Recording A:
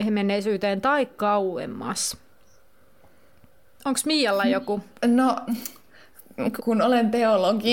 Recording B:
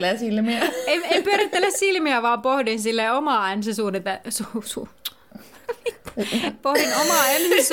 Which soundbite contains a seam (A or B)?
A